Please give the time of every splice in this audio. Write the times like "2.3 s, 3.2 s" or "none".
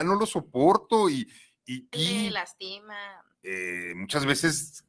1.9 s, 3.3 s